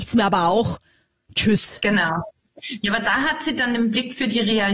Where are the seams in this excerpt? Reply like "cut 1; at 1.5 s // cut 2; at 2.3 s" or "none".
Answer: none